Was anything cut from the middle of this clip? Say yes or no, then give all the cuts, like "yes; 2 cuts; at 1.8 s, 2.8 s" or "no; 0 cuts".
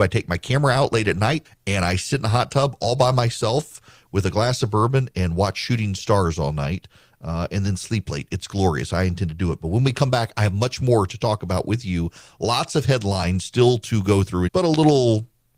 yes; 2 cuts; at 1.4 s, 14.5 s